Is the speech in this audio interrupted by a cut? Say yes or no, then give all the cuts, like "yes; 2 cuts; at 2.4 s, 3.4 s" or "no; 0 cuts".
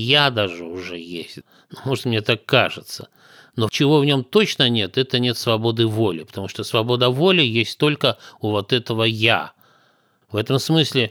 yes; 1 cut; at 10.2 s